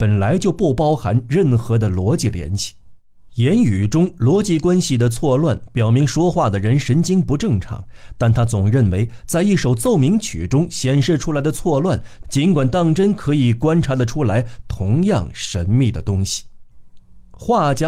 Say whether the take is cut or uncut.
cut